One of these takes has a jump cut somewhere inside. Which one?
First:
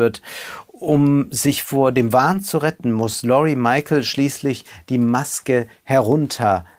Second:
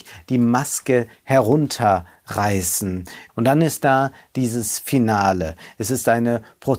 second; 1 cut; at 3.3 s

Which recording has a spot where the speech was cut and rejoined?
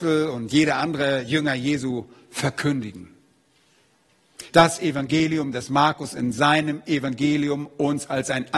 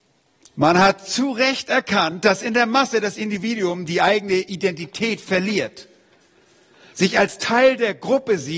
first; 1 cut; at 4.5 s

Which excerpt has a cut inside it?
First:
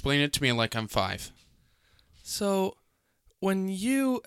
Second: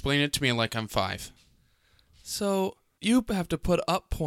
second; 1 cut; at 3.0 s

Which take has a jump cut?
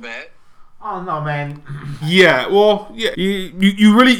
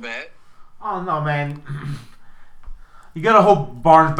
first; 2 cuts; at 2.0 s, 3.1 s

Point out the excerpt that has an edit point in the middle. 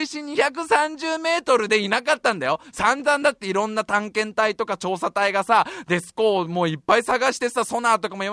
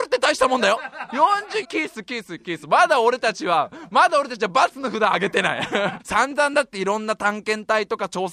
second; 2 cuts; at 1.6 s, 6.0 s

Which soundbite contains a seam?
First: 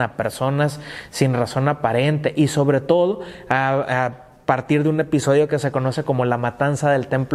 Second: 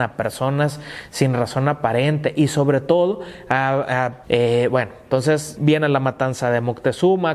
second; 2 cuts; at 4.2 s, 5.5 s

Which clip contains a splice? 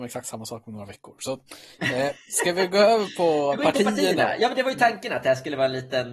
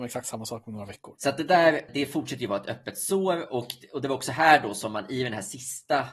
second; 1 cut; at 1.2 s

